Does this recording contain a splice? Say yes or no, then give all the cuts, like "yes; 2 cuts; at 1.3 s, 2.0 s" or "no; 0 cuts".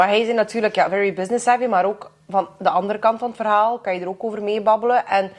no; 0 cuts